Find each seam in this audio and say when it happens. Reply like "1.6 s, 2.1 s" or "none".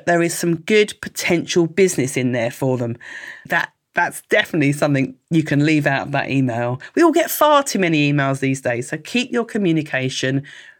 3.5 s

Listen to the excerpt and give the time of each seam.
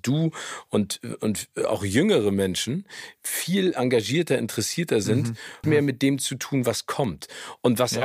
5.6 s

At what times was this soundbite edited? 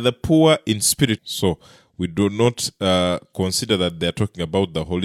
1.2 s

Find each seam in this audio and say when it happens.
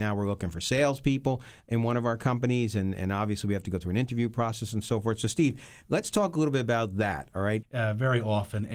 7.6 s

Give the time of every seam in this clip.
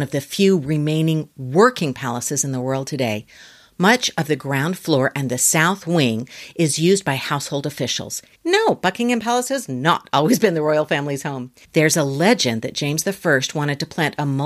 8.3 s, 11.6 s

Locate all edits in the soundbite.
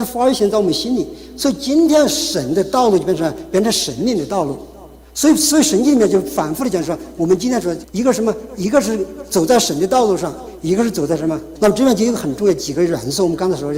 7.8 s, 11.6 s

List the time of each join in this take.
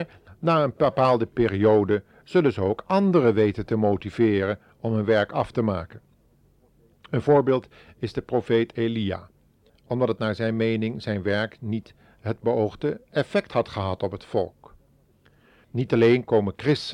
9.7 s, 15.6 s

